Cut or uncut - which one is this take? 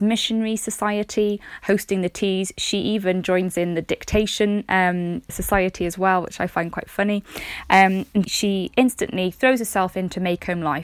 cut